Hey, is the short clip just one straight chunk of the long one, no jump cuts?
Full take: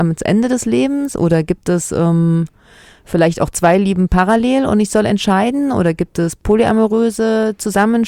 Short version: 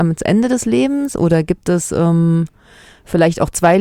yes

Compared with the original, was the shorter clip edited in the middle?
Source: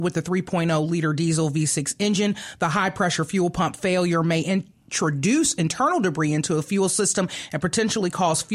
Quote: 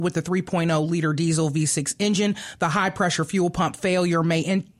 no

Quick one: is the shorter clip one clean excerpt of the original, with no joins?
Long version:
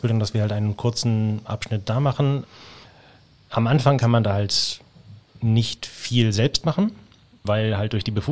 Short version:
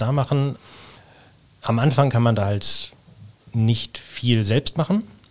yes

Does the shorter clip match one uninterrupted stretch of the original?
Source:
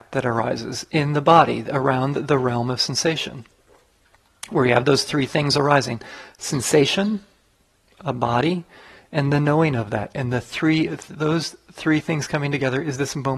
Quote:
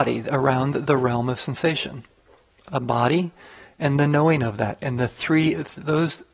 no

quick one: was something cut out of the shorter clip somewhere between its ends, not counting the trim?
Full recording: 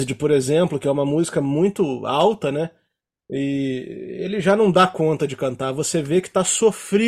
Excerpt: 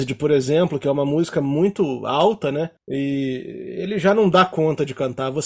yes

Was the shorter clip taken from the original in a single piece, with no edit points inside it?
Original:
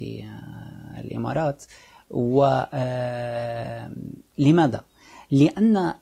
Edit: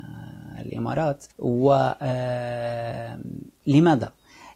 no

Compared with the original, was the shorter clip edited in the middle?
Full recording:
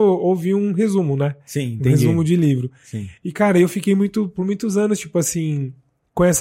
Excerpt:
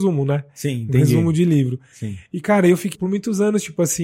yes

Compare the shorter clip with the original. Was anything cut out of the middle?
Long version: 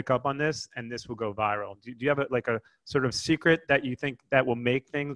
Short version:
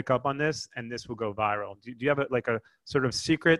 no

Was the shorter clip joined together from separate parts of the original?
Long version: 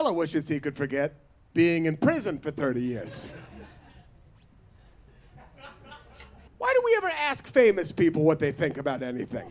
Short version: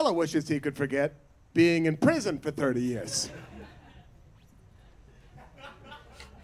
no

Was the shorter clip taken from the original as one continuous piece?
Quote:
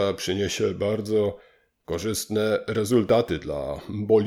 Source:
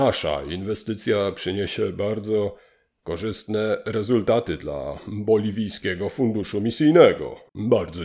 yes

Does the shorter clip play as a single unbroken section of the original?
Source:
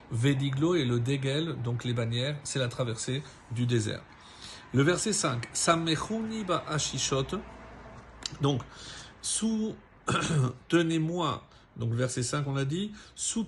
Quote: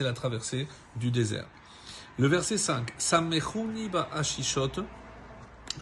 yes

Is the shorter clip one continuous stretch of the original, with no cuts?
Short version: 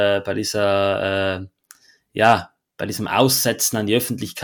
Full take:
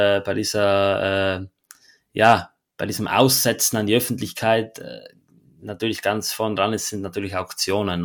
yes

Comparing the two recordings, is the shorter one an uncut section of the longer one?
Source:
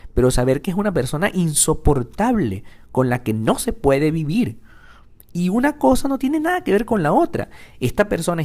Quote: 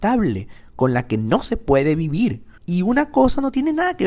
no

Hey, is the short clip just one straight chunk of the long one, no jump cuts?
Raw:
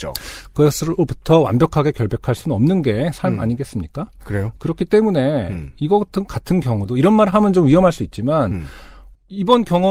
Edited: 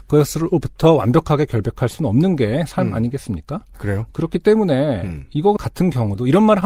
no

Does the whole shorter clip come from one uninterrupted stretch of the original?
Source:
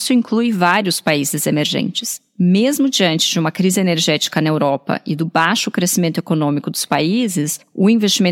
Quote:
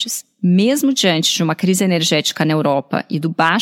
yes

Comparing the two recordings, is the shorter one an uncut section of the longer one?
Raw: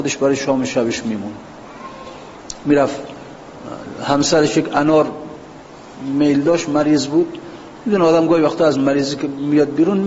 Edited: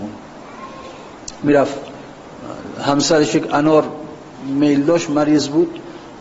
no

